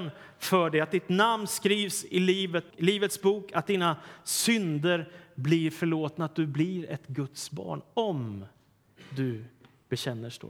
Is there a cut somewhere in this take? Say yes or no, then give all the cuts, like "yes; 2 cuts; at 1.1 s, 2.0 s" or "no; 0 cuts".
yes; 1 cut; at 2.7 s